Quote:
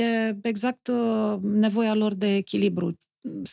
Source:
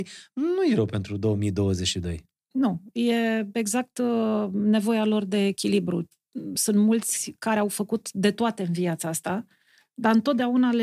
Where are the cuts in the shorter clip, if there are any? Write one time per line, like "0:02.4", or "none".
none